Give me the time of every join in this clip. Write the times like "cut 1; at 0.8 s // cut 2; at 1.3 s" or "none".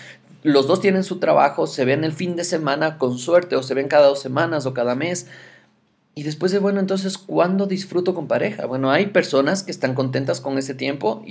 none